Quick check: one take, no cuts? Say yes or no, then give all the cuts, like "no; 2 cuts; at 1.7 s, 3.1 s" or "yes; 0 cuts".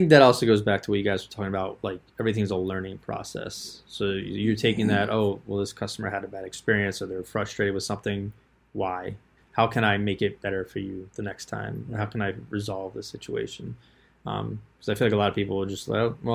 no; 1 cut; at 9.4 s